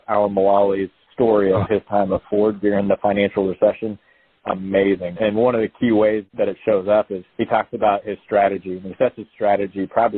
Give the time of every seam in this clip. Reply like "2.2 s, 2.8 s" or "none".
4.4 s, 7.3 s